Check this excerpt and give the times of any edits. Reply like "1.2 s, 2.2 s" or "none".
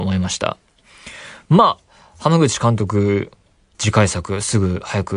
none